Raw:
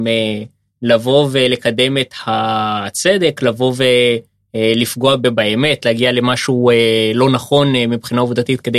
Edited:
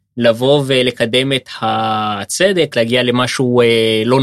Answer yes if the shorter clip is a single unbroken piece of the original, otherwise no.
no